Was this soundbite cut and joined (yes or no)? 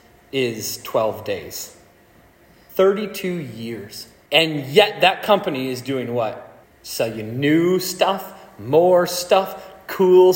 yes